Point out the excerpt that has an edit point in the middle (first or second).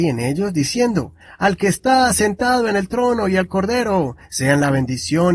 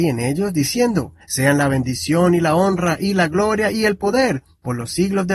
second